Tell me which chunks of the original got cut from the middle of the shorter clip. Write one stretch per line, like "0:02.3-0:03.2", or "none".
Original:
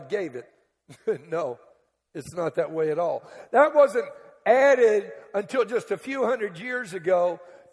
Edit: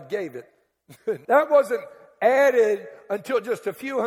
0:01.2-0:03.5